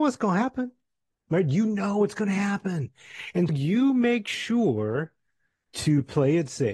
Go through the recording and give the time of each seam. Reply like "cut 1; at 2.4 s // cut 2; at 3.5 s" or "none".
cut 1; at 3.5 s